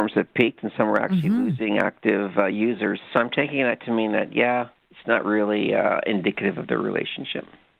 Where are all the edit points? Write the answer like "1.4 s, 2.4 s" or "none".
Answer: 3.1 s